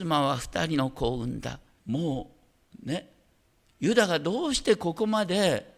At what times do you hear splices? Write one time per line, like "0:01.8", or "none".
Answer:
0:01.8